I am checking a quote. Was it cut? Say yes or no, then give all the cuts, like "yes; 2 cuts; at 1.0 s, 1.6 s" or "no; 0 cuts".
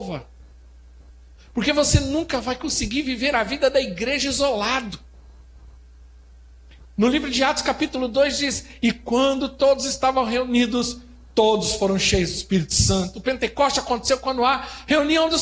yes; 1 cut; at 1.4 s